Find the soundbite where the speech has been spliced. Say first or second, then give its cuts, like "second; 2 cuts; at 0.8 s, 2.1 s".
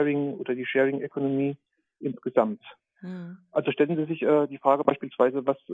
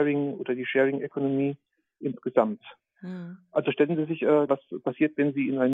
second; 1 cut; at 4.5 s